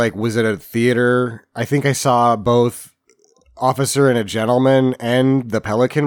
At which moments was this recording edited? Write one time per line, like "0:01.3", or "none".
none